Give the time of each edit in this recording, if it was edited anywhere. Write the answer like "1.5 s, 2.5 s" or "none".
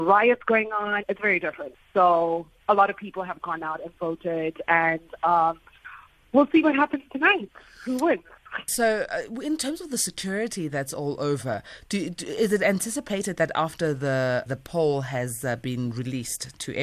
1.0 s, 8.7 s, 14.5 s